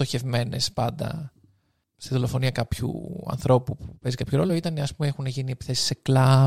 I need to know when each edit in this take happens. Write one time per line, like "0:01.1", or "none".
none